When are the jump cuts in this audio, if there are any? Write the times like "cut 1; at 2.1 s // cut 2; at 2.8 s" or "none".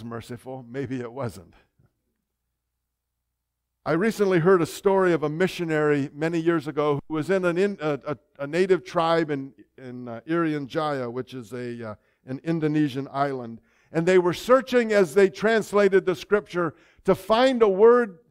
none